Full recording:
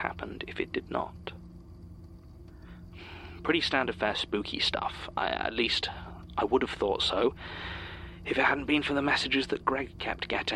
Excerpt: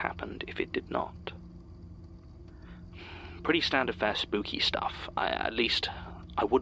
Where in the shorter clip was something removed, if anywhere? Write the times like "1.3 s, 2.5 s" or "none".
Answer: none